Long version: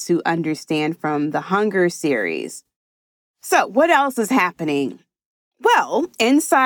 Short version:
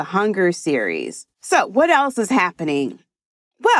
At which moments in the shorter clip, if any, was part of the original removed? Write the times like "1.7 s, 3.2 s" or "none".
1.3 s